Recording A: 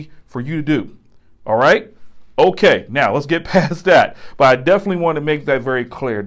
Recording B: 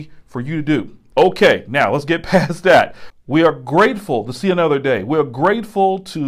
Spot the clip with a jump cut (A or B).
B